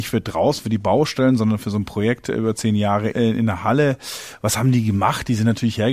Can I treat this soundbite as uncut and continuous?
no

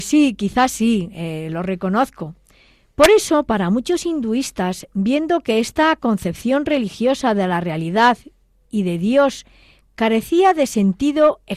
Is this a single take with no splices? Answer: yes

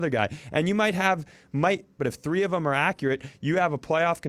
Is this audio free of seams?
no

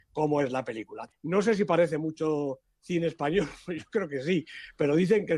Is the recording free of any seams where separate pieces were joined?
no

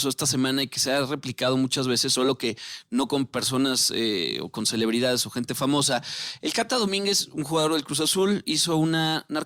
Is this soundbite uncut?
yes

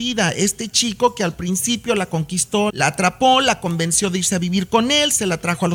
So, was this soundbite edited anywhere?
yes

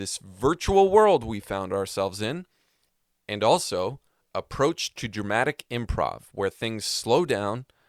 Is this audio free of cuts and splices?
yes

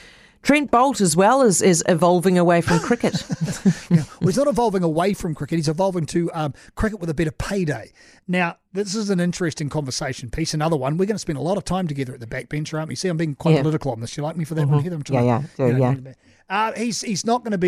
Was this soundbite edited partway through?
no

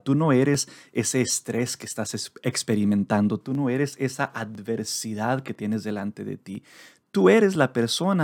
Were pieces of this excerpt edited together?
yes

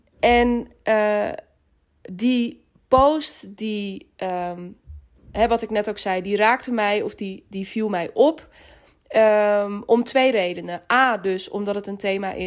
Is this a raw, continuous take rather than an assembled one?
yes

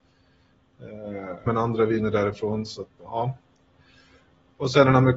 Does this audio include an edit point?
yes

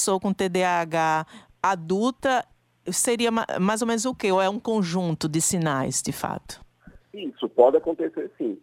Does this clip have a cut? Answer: yes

